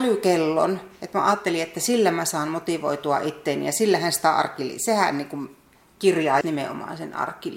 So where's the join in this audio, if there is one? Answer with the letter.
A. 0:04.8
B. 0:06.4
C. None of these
B